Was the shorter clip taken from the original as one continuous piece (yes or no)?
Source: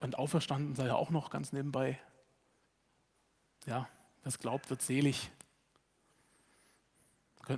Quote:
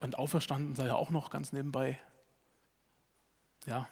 yes